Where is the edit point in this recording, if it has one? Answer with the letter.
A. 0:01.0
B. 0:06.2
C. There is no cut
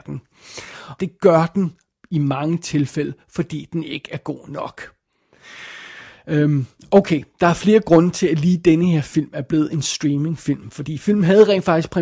A